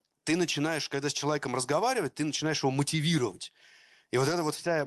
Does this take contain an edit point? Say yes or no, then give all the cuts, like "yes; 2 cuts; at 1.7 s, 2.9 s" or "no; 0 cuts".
no; 0 cuts